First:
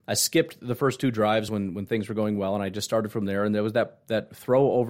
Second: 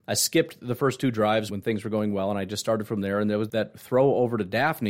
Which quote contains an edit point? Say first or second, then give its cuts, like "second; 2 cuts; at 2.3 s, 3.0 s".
second; 2 cuts; at 1.5 s, 3.5 s